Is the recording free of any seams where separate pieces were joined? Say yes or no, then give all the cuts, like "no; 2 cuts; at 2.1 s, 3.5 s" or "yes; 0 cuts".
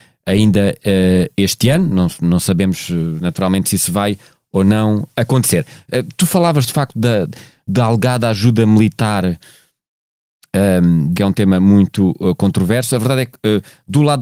no; 2 cuts; at 5.1 s, 11.1 s